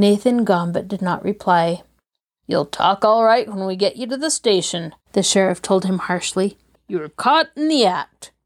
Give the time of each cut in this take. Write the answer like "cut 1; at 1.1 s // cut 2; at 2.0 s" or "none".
cut 1; at 5.0 s // cut 2; at 6.8 s